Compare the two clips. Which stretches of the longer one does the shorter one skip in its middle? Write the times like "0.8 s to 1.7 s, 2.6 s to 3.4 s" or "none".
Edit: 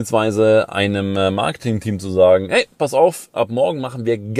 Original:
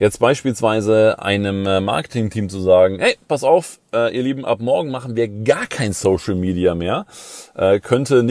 3.8 s to 4.4 s